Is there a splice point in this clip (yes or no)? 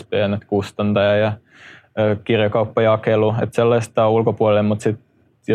no